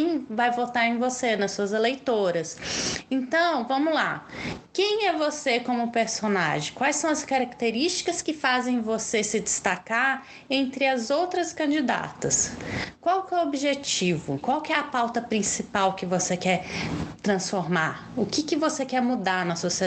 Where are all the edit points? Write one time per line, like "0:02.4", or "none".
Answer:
0:14.4